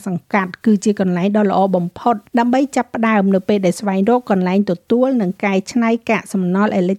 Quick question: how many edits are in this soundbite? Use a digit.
1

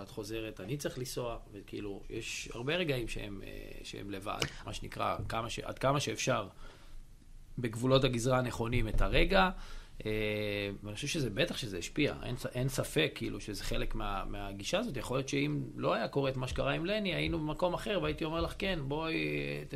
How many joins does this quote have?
2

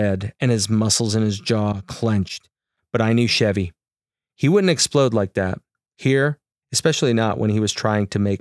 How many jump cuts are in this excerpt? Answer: 0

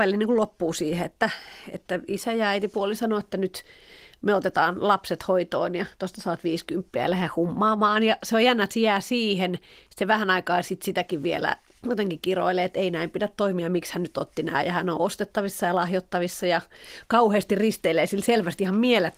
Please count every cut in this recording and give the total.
0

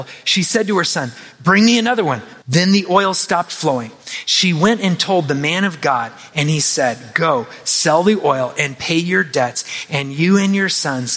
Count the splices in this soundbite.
1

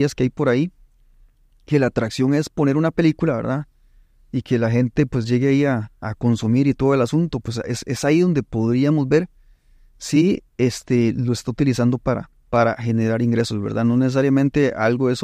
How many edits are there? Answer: 1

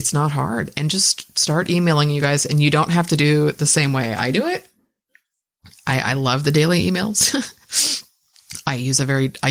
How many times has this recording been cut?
0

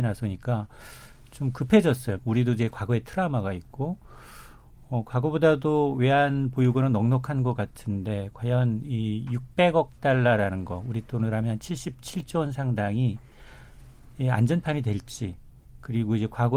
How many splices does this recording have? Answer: 1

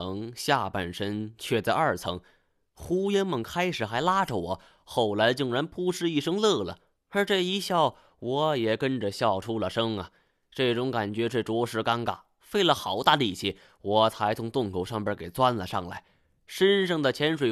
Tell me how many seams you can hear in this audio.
0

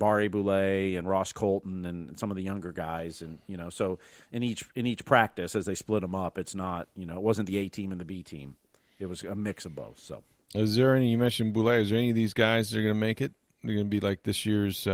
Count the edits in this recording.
0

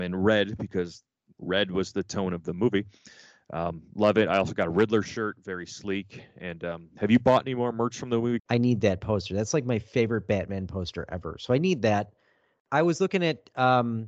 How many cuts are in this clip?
1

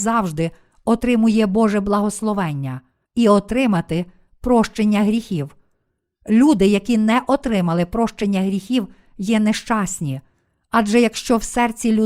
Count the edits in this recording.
1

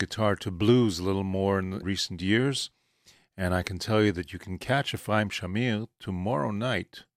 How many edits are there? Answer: 1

